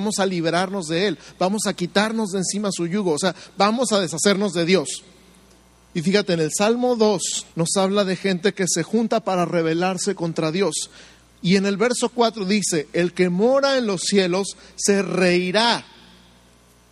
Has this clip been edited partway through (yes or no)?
yes